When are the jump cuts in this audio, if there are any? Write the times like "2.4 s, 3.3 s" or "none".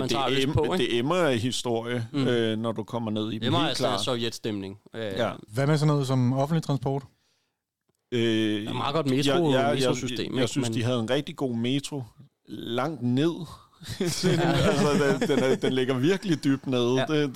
5.5 s